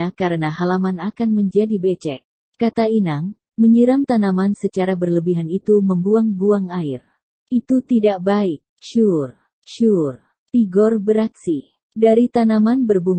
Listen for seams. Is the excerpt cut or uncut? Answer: uncut